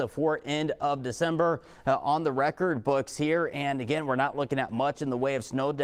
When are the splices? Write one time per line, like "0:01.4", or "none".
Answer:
none